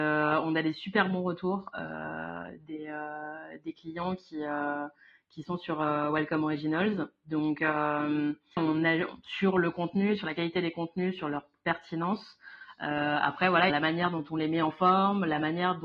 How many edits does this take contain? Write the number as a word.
two